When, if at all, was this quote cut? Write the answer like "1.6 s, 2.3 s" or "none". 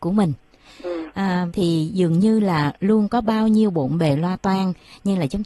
1.5 s

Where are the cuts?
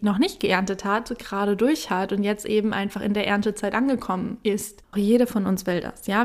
4.9 s

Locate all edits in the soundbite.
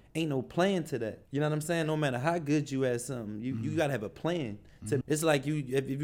1.3 s, 5.0 s

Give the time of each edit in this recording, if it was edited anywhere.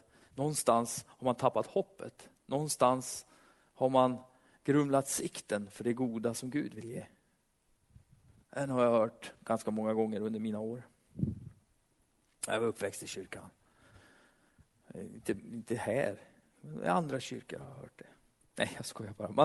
8.4 s

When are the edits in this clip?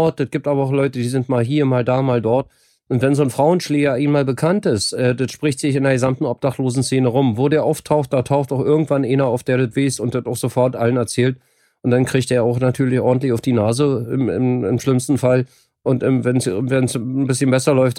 none

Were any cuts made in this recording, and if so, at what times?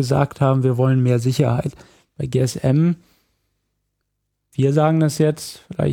none

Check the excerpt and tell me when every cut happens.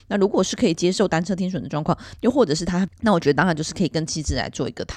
2.9 s

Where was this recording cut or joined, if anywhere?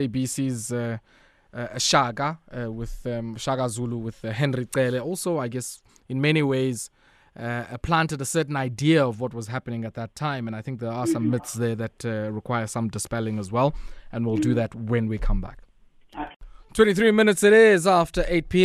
none

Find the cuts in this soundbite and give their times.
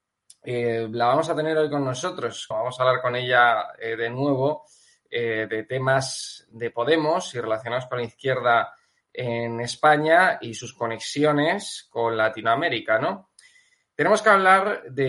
2.5 s

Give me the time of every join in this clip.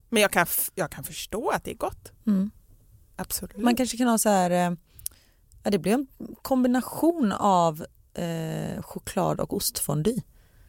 2.2 s

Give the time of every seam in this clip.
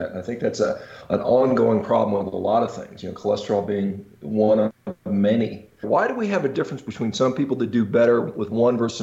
5.8 s

